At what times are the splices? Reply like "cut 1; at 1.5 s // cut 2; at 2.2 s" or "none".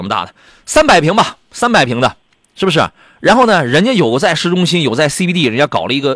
none